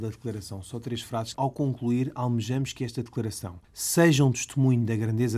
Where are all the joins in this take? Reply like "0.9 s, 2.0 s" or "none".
1.3 s, 3.6 s